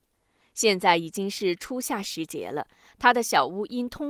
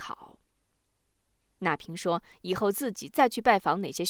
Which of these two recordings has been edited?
second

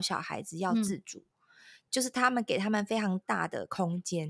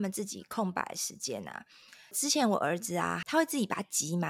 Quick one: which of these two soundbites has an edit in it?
second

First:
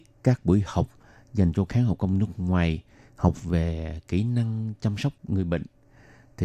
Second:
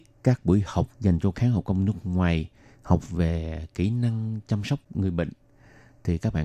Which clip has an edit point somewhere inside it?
second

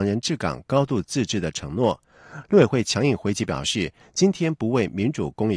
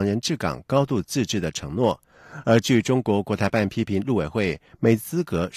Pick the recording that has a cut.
first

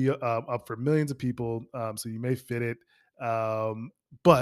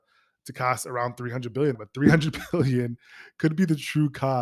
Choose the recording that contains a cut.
second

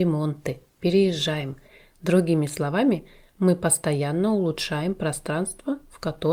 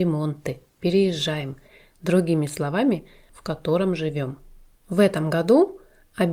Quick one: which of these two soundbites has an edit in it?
second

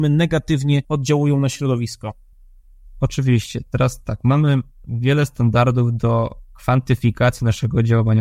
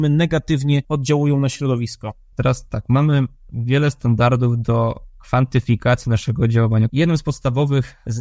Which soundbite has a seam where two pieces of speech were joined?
second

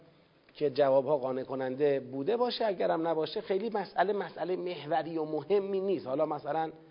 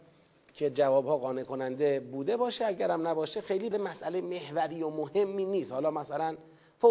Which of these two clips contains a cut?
second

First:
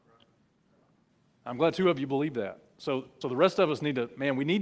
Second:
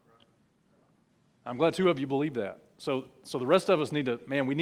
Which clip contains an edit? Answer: first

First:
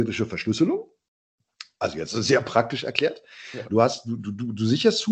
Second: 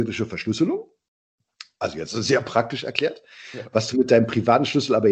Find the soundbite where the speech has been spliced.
first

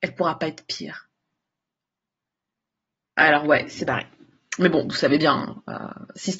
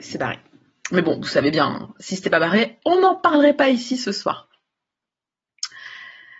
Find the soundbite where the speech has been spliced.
second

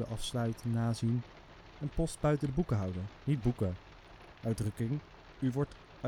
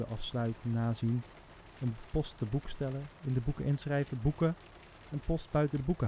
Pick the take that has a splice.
first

